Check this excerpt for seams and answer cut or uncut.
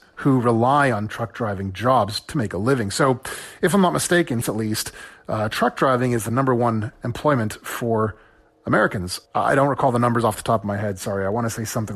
cut